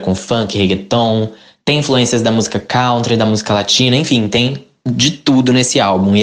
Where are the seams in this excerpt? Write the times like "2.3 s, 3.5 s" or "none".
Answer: none